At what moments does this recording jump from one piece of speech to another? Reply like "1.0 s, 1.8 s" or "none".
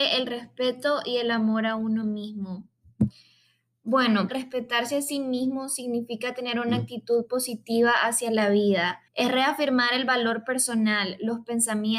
4.3 s, 9.1 s